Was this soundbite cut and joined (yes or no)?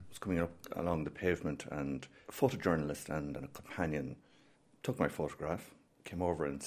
no